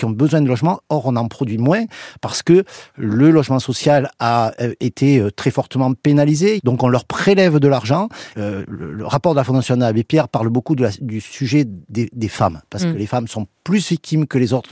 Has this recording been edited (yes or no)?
yes